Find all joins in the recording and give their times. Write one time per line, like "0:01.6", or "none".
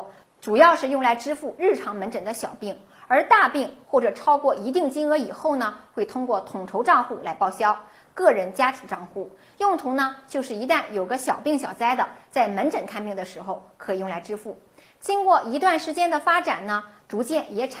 0:08.0